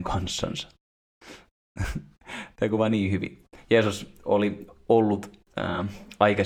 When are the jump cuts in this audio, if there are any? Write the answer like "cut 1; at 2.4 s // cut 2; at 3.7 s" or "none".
none